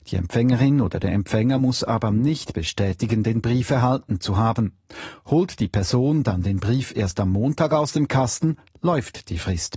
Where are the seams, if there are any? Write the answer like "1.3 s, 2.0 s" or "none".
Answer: none